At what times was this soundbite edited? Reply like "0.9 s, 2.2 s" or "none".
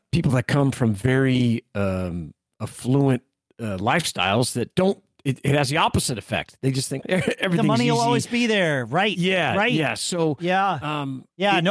7.0 s